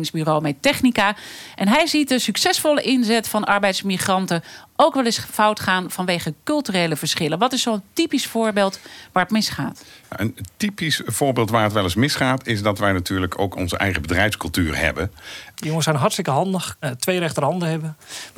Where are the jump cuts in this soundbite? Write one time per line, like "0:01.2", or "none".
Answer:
0:15.5
0:16.8